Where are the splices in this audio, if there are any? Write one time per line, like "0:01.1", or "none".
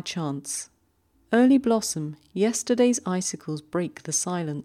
0:01.1

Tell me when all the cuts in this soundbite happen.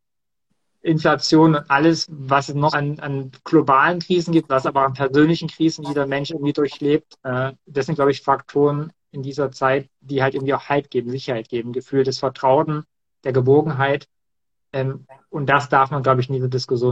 0:02.7

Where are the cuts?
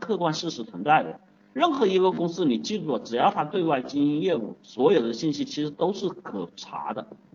0:01.4

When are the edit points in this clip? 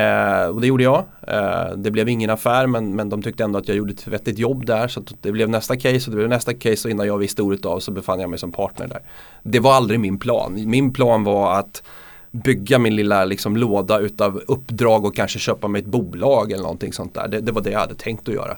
none

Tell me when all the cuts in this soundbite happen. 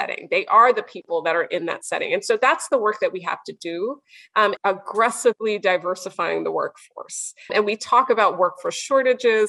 0:04.6
0:07.5

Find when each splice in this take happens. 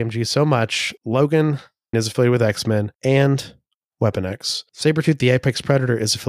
0:01.9

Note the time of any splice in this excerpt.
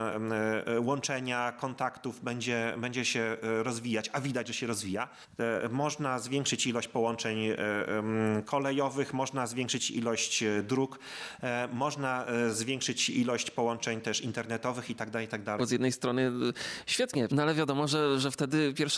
0:15.6
0:17.3

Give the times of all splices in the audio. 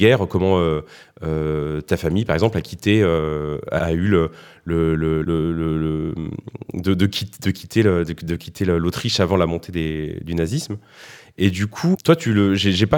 0:03.8
0:05.2
0:11.9

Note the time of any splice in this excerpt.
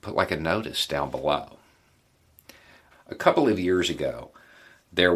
0:02.9

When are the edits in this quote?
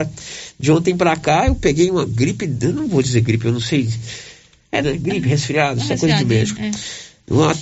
0:04.8

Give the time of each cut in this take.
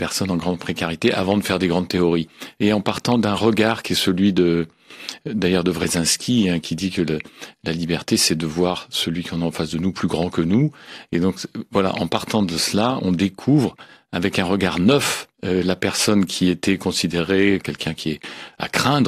0:15.3
0:17.6

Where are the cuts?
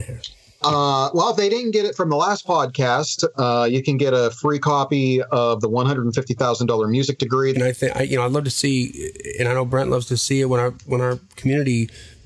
0:07.5

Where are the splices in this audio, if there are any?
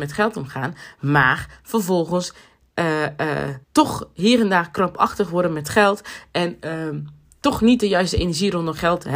0:03.6

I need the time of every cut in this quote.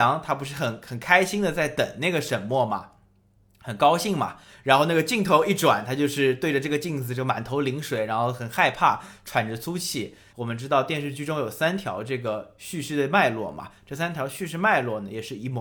0:10.3

